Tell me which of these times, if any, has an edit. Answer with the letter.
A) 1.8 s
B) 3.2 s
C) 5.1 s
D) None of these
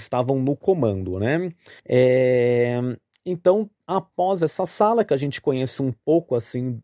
A